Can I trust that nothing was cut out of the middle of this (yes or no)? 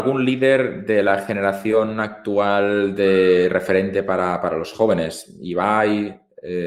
yes